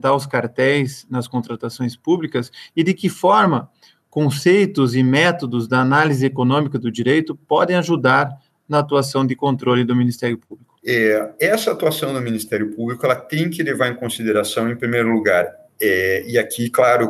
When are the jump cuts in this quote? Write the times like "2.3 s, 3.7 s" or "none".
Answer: 10.8 s